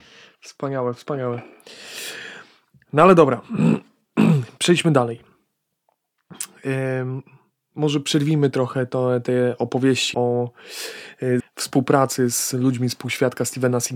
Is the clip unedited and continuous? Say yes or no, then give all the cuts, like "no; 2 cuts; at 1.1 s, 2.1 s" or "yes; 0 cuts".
no; 2 cuts; at 10.1 s, 11.4 s